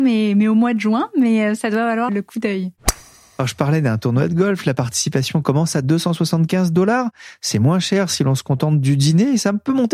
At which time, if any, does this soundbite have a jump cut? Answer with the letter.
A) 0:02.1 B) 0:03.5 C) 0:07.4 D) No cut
A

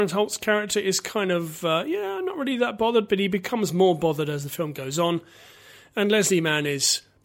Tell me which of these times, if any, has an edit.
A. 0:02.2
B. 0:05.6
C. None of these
C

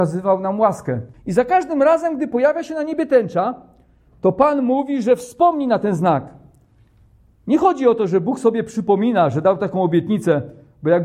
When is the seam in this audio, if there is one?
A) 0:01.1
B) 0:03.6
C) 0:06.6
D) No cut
A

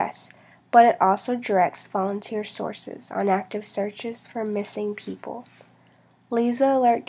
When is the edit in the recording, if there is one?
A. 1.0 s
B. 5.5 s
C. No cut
C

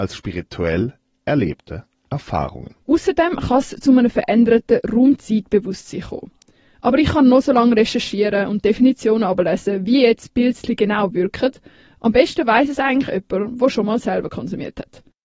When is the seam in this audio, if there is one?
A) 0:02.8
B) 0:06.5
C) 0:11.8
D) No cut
A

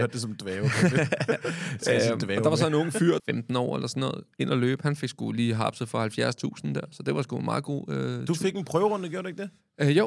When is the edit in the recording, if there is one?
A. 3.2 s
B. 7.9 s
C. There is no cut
A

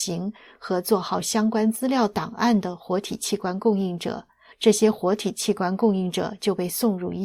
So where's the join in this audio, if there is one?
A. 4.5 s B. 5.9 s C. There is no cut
A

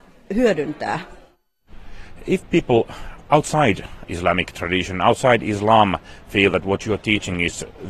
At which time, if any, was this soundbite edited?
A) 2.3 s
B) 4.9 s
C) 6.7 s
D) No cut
D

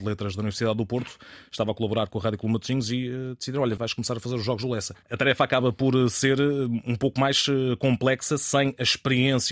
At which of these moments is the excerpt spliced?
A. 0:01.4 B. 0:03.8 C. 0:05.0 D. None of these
B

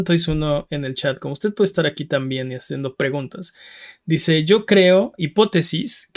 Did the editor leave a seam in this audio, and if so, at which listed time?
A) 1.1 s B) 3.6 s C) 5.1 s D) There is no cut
D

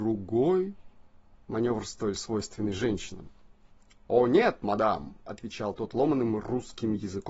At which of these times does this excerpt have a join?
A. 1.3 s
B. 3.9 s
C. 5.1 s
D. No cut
A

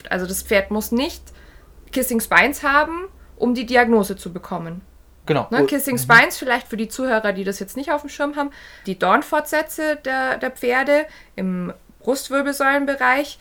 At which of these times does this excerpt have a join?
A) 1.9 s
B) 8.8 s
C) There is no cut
B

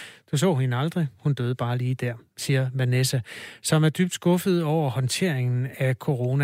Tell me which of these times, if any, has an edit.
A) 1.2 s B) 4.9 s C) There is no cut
C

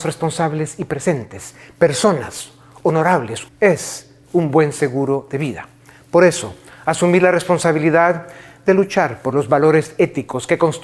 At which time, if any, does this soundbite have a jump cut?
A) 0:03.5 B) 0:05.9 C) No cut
A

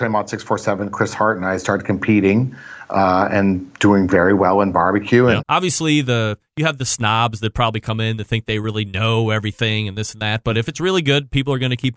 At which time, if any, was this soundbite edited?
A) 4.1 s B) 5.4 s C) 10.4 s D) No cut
B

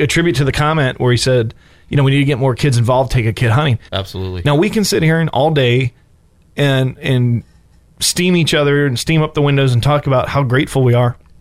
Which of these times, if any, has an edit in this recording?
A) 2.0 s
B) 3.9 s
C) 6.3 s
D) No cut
B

